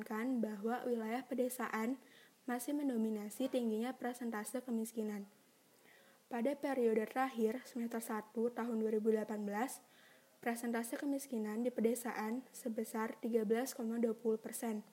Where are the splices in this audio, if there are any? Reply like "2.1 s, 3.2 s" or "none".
none